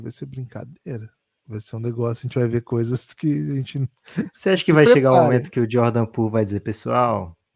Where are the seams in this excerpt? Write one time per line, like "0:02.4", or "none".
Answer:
none